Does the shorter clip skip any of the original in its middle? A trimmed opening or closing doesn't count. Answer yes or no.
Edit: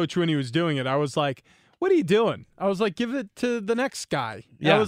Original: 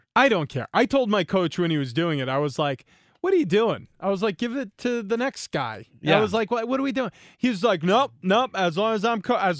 no